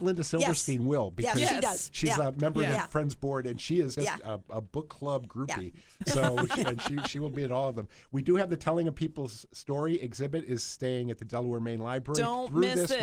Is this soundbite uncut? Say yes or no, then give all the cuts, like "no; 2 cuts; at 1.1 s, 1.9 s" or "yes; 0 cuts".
no; 1 cut; at 4.0 s